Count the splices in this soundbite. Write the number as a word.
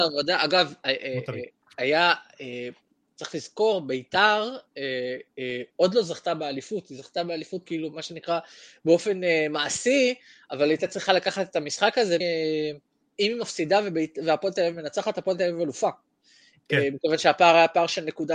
one